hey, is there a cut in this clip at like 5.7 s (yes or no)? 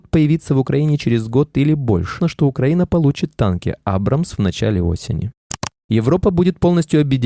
no